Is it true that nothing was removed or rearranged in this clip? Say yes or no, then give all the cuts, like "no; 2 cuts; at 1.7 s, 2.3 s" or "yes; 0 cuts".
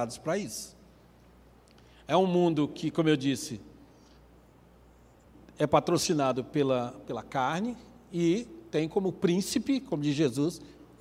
no; 1 cut; at 7.0 s